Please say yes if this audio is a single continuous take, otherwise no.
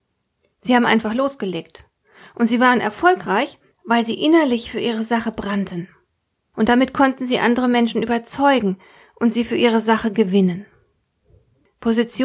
yes